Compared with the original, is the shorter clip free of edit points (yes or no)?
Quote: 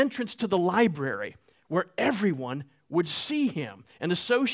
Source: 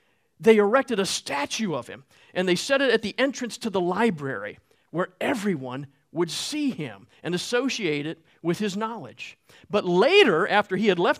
yes